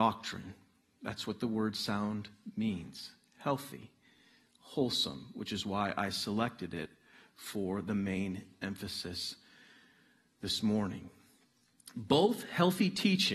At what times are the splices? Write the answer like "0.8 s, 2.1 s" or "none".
none